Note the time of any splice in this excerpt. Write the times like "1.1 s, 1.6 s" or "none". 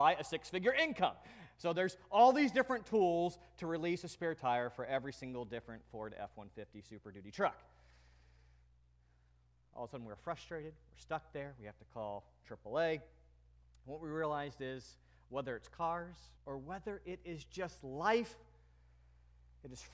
16.4 s